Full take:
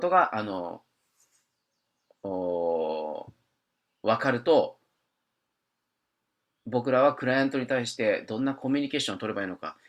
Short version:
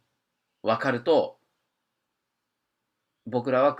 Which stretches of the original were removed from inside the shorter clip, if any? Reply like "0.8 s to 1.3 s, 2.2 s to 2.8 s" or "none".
none